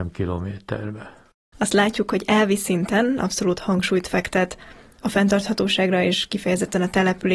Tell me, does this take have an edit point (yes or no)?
yes